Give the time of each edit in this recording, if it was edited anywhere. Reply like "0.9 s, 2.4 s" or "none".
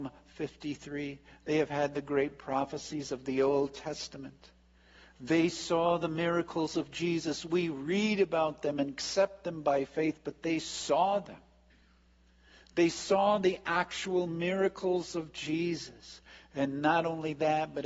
none